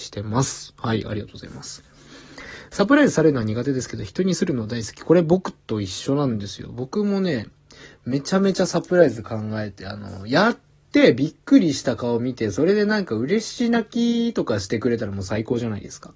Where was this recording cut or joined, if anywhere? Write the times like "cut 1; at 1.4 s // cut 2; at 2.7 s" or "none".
none